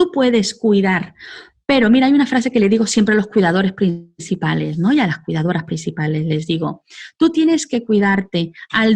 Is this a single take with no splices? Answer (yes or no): yes